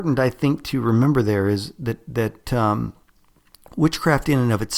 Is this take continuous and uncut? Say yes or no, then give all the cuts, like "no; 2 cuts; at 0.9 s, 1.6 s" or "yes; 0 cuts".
yes; 0 cuts